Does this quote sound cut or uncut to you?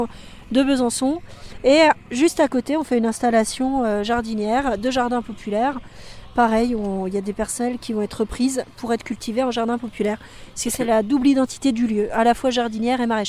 uncut